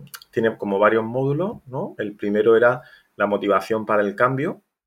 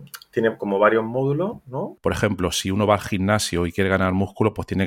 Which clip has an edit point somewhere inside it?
second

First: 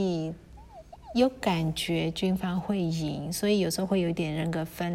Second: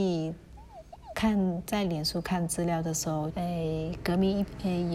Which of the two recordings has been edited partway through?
second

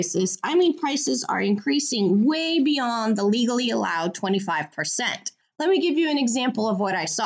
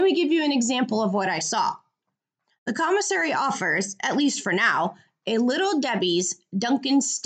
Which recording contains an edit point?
first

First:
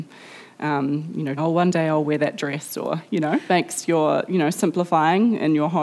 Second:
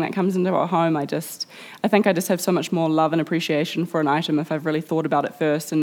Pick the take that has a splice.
first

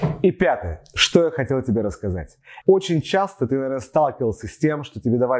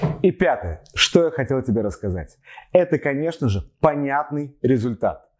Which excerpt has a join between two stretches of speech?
first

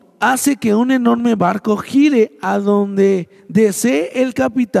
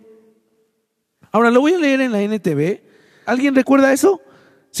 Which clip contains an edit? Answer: second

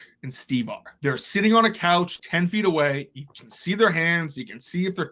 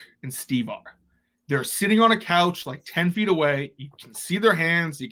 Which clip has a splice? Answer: first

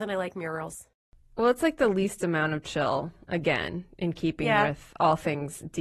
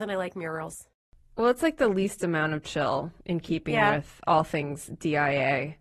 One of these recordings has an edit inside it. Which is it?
second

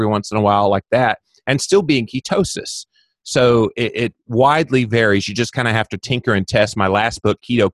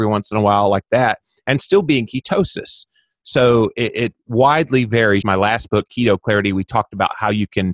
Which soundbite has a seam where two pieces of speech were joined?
second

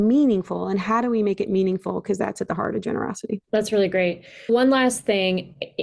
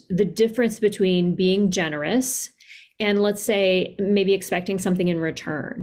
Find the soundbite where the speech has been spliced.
first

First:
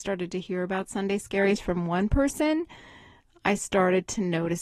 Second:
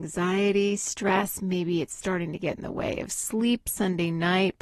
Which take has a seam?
second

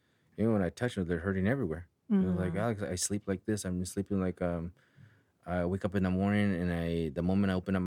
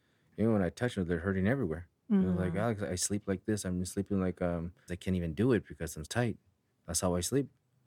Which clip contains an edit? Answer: second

